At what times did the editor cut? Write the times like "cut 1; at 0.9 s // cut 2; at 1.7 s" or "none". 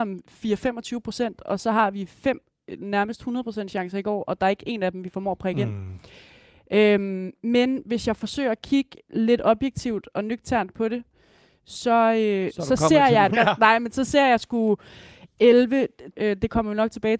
cut 1; at 13.3 s // cut 2; at 16.1 s